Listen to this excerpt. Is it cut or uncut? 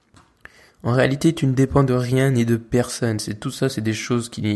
uncut